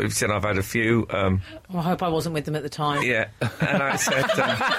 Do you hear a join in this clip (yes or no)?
yes